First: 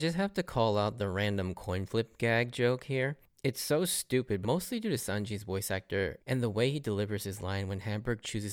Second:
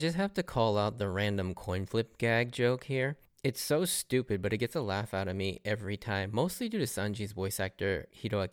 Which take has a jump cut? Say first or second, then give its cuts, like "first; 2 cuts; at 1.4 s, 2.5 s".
first; 2 cuts; at 4.4 s, 6.2 s